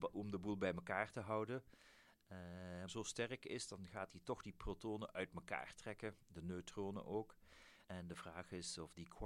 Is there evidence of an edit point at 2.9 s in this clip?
yes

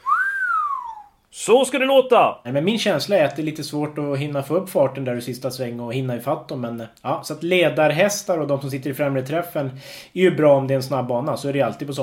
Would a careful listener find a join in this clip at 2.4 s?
yes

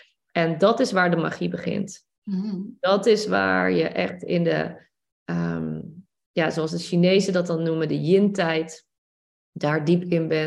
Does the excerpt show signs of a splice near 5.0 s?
no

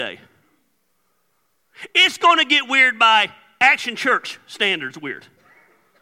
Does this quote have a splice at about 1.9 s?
no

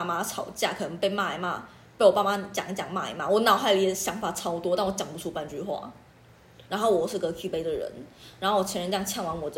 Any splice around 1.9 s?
no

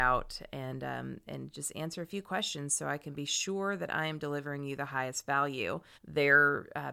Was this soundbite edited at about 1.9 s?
no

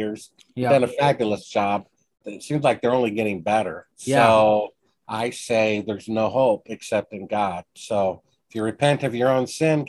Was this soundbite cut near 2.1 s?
no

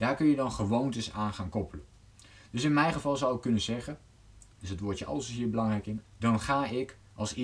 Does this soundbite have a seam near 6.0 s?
yes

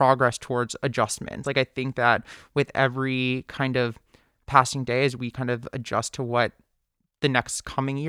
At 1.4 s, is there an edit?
no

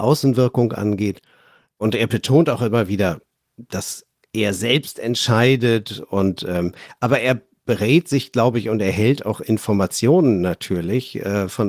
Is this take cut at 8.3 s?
no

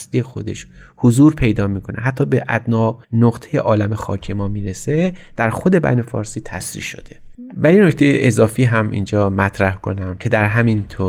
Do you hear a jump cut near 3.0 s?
yes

